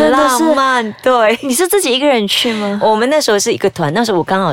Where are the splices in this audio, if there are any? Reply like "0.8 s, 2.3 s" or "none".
none